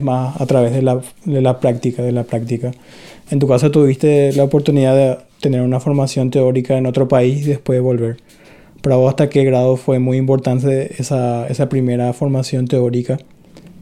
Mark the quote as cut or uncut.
uncut